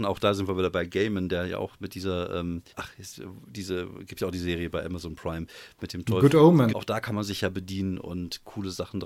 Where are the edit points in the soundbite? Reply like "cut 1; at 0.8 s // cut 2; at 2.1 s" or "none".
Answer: cut 1; at 2.7 s // cut 2; at 6.7 s